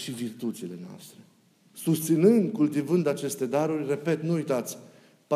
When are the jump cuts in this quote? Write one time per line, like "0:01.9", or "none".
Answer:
0:01.7